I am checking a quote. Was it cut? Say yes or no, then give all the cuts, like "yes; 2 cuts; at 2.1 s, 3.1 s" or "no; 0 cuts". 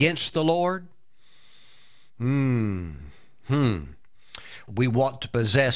yes; 1 cut; at 4.7 s